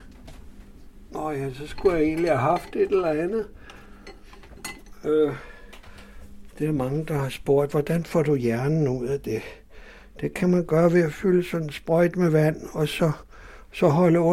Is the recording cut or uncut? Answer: uncut